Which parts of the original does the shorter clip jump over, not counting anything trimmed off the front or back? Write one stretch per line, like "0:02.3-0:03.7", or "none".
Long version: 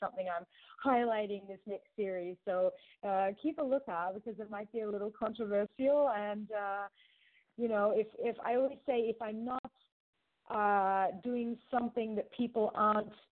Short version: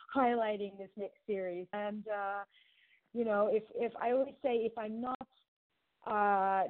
0:02.4-0:06.2